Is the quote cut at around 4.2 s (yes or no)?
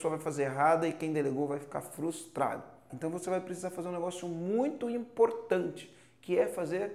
no